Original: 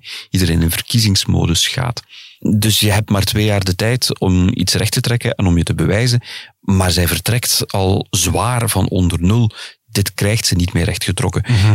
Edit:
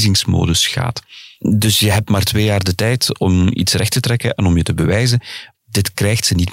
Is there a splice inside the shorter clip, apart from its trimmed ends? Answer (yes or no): yes